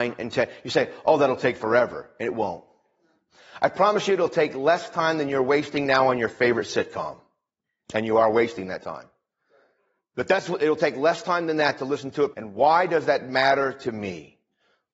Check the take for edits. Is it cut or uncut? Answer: cut